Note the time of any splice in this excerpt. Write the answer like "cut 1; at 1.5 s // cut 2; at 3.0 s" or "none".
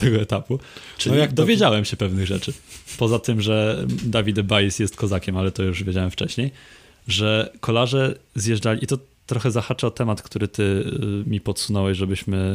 none